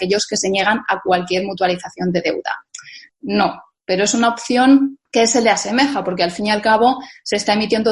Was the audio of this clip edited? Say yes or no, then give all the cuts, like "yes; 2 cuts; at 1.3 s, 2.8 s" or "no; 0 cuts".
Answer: yes; 2 cuts; at 3.1 s, 5.1 s